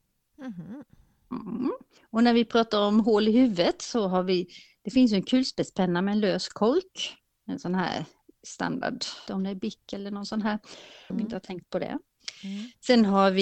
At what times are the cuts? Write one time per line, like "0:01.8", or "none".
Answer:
0:09.3
0:11.1